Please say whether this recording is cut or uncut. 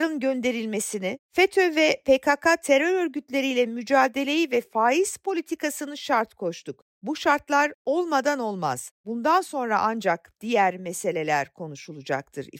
uncut